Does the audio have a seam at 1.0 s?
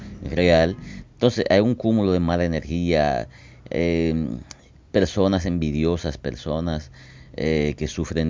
yes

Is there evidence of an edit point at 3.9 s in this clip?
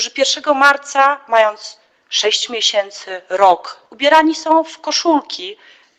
yes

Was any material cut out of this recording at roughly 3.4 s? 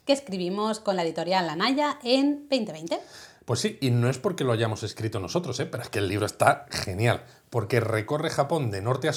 no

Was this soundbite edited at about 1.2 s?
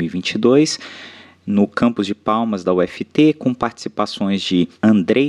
no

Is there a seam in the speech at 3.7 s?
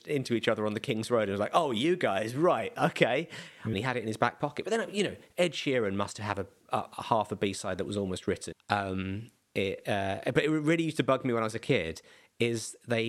yes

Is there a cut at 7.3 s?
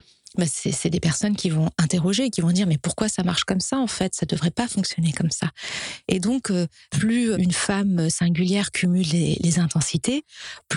yes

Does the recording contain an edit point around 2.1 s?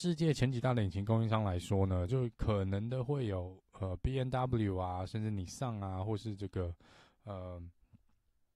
no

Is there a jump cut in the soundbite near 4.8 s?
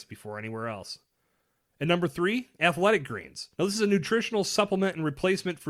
no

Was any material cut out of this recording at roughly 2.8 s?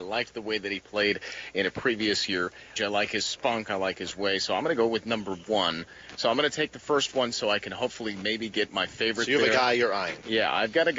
yes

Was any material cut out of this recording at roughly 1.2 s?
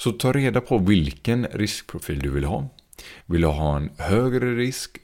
no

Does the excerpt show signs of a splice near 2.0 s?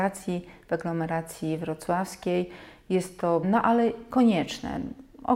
no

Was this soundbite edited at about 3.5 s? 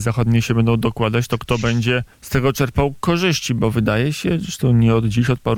no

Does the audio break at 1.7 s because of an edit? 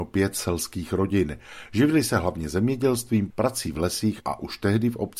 no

